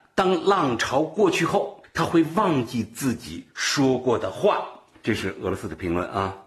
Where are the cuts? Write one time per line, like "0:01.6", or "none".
none